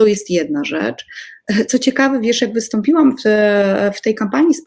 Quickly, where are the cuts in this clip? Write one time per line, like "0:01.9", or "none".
none